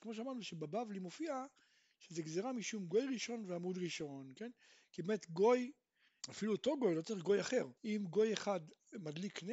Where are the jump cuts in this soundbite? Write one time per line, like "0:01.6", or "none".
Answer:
0:06.2
0:07.8